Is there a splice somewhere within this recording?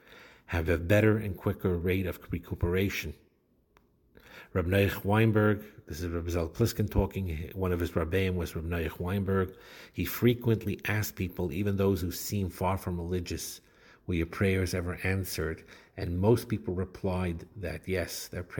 no; 0 cuts

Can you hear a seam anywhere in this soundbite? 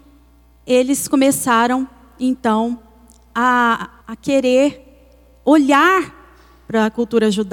yes; 1 cut; at 4.0 s

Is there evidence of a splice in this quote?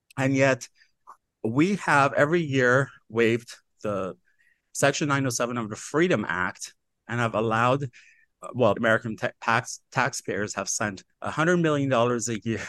yes; 2 cuts; at 8.7 s, 11.1 s

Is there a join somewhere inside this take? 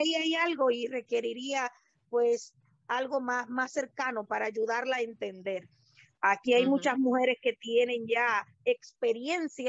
no; 0 cuts

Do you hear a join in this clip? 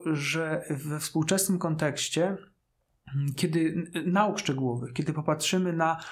no; 0 cuts

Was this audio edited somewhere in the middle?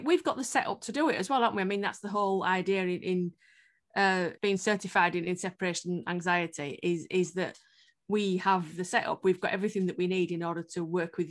yes; 1 cut; at 4.4 s

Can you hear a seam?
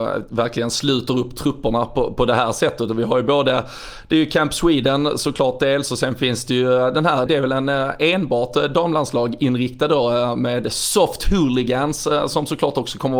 yes; 1 cut; at 7.3 s

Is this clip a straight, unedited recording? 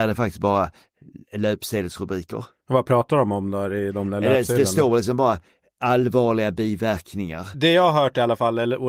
no; 1 cut; at 7.5 s

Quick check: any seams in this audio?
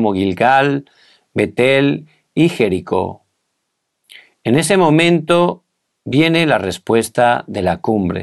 no; 0 cuts

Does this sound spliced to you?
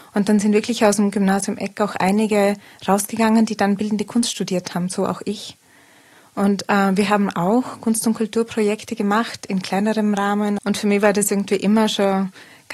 yes; 1 cut; at 10.6 s

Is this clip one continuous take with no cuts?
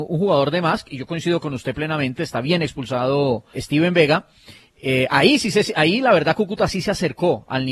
no; 1 cut; at 3.5 s

